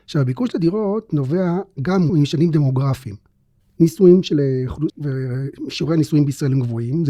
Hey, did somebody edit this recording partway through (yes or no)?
yes